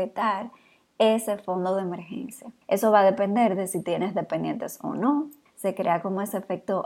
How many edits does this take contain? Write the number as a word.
two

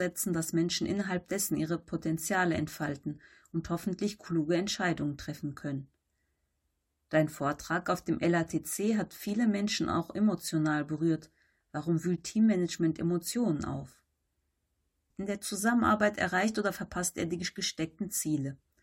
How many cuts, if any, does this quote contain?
one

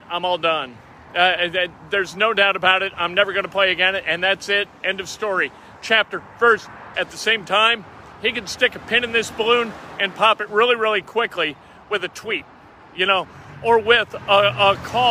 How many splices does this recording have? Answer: one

